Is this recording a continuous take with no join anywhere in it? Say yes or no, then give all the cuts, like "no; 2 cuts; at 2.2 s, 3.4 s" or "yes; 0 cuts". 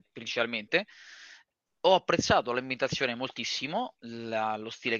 yes; 0 cuts